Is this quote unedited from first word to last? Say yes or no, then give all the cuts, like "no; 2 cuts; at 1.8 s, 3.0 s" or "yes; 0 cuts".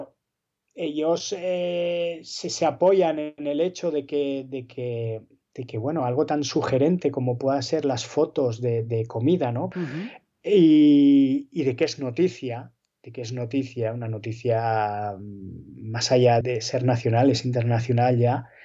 no; 2 cuts; at 9.7 s, 16.4 s